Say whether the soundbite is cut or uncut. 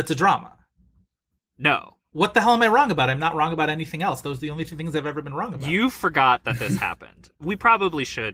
uncut